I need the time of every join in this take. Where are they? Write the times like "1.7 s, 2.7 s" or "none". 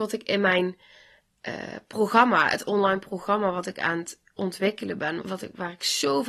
5.2 s

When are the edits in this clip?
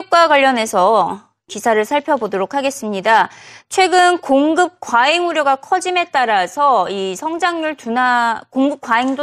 none

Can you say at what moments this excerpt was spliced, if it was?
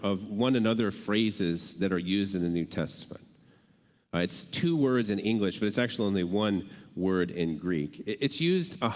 none

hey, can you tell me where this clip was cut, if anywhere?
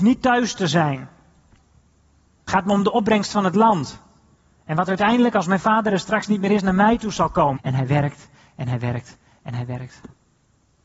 7.6 s

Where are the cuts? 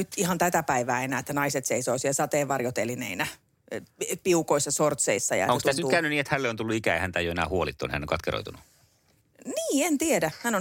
none

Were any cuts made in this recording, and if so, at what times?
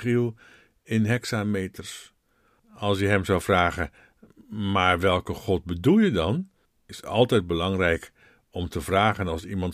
2.6 s

